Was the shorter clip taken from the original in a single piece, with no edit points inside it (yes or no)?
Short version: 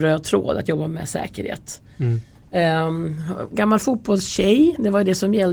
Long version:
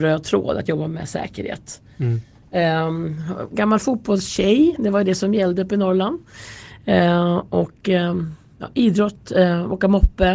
yes